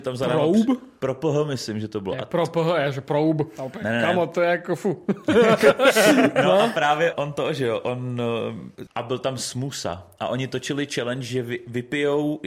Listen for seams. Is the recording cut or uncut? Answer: cut